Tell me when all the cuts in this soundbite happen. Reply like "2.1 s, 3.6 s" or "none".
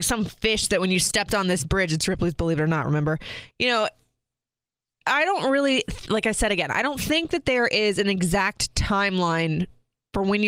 3.5 s